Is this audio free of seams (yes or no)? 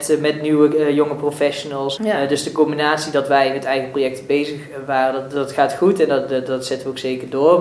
no